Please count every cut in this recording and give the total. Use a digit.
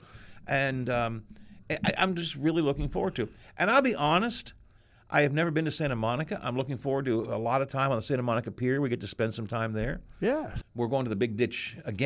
1